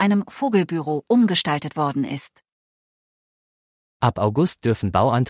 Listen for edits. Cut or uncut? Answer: uncut